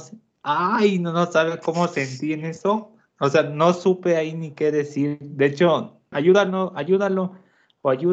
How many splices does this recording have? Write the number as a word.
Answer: one